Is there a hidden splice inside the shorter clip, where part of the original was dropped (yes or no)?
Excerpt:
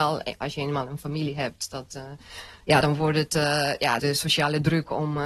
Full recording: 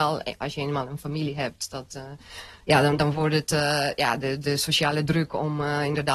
yes